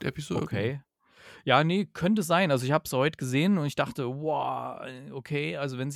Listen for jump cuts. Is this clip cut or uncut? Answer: uncut